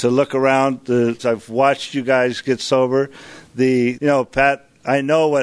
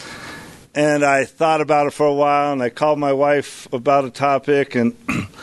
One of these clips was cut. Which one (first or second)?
first